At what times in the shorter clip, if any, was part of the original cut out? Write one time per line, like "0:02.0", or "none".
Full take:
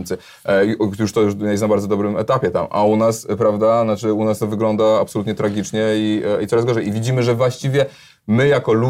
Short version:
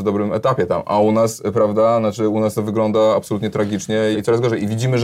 0:04.1